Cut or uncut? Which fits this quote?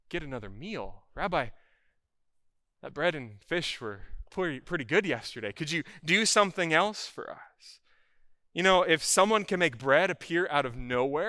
uncut